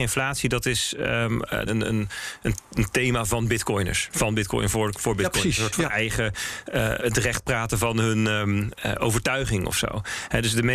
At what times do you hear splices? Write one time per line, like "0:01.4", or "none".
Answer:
0:01.7
0:07.0